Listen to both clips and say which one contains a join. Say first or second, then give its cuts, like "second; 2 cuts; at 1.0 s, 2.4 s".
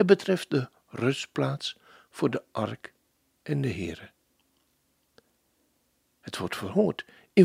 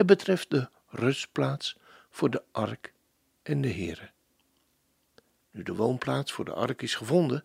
second; 1 cut; at 5.4 s